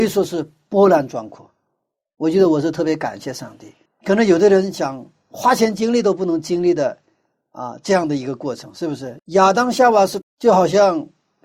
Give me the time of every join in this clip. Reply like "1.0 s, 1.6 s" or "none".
3.8 s, 9.2 s, 10.2 s